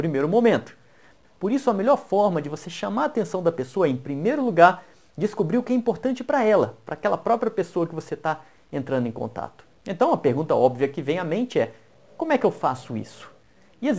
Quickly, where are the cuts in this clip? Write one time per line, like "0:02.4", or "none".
0:01.2
0:09.8